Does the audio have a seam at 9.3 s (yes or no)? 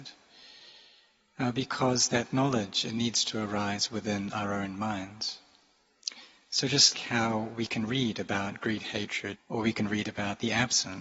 yes